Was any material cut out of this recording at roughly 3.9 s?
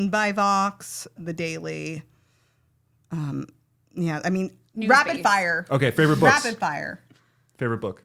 no; 1 cut; at 1.2 s

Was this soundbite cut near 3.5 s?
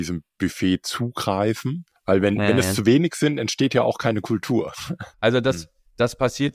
no; 2 cuts; at 2.0 s, 5.1 s

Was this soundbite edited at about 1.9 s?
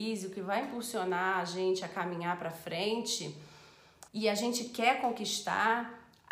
no; 1 cut; at 4.1 s

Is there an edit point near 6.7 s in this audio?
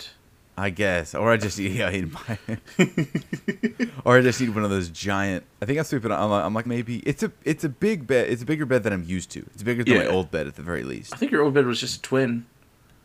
yes; 1 cut; at 6.7 s

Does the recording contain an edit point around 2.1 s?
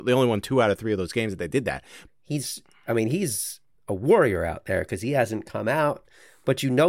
yes; 1 cut; at 2.1 s

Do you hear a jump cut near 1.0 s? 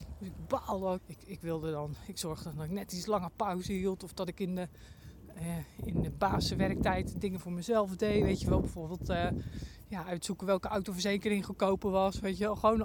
yes; 1 cut; at 1.0 s

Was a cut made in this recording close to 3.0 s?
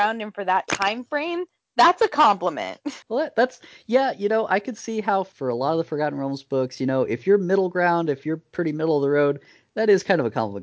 yes; 1 cut; at 3.0 s

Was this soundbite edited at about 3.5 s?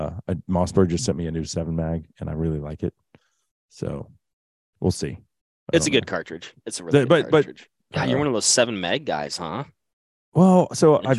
no; 1 cut; at 7.8 s

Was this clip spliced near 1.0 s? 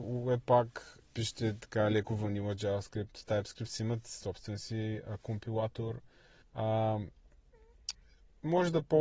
yes; 2 cuts; at 1.0 s, 6.4 s

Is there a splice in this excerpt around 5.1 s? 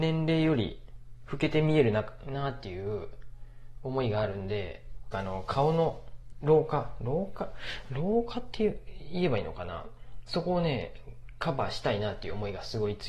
yes; 1 cut; at 5.1 s

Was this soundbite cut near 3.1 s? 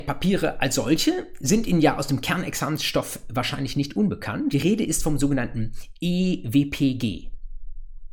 no; 1 cut; at 4.5 s

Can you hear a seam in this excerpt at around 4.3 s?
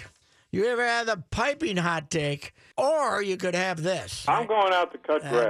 no; 1 cut; at 2.7 s

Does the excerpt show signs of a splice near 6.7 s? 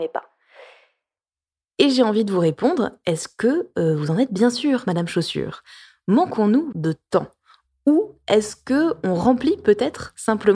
yes; 1 cut; at 6.7 s

